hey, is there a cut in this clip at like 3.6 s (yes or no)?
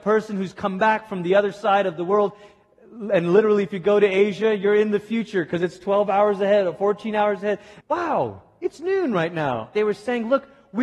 no